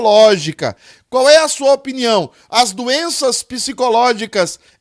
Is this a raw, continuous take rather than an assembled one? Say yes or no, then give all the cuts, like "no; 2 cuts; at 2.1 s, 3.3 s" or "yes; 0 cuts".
no; 1 cut; at 0.9 s